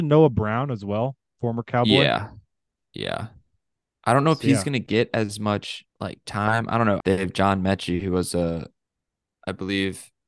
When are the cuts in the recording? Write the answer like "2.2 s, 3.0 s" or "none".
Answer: 5.9 s, 7.0 s

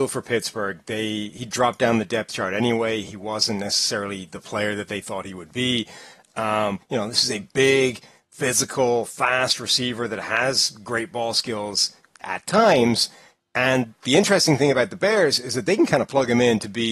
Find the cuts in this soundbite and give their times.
6.8 s

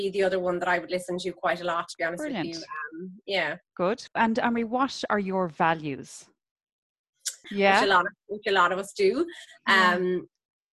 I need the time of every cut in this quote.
7.4 s

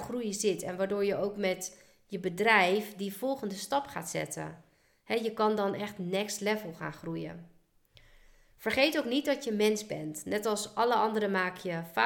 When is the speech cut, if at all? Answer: none

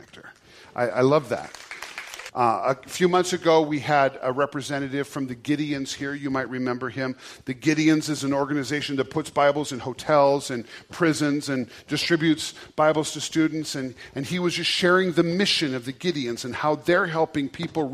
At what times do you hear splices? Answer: 2.3 s

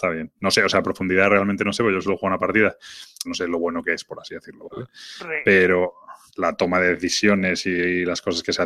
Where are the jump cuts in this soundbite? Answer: 3.3 s, 6.3 s

